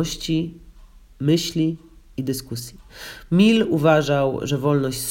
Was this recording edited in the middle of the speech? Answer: no; 0 cuts

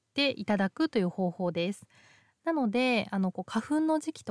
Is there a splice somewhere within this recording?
yes; 1 cut; at 2.3 s

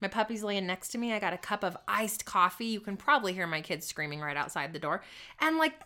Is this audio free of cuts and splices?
yes; 0 cuts

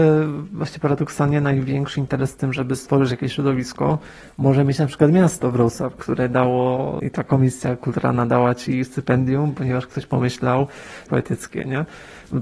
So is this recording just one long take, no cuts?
no; 1 cut; at 11.1 s

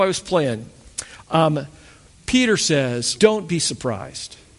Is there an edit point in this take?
yes; 1 cut; at 3.2 s

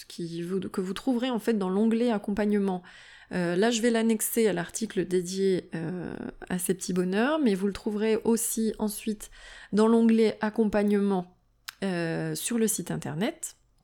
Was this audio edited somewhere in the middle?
no; 0 cuts

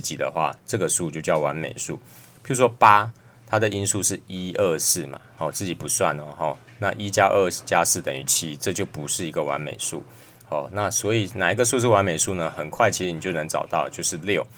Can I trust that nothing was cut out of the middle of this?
yes; 0 cuts

